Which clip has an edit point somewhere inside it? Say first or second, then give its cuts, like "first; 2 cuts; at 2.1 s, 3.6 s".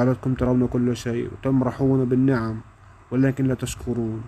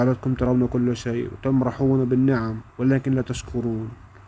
second; 1 cut; at 2.7 s